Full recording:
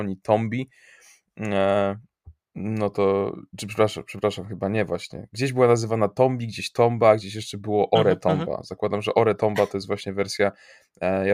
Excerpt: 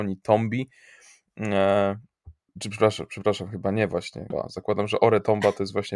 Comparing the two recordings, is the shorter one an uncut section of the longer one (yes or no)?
no